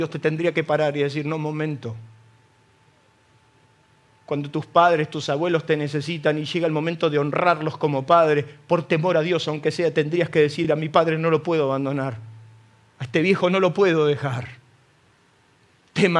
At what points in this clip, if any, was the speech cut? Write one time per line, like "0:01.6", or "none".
none